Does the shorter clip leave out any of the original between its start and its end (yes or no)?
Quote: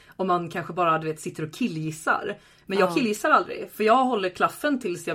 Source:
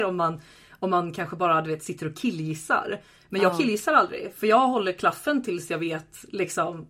no